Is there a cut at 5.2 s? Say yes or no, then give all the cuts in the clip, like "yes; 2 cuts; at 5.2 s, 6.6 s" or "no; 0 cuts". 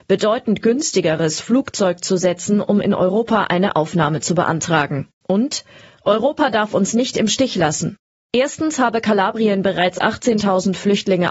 yes; 1 cut; at 5.2 s